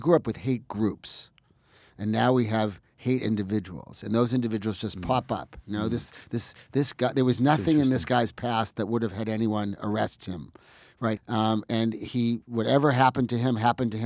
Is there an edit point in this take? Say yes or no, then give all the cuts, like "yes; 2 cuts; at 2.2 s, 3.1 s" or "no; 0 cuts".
yes; 1 cut; at 11.2 s